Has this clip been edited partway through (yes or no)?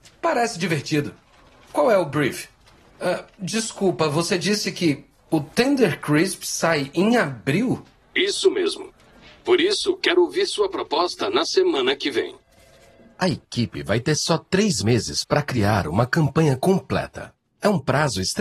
yes